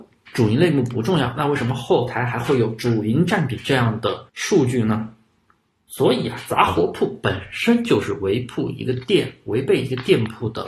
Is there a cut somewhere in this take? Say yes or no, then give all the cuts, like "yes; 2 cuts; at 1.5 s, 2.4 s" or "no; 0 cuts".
yes; 1 cut; at 4.3 s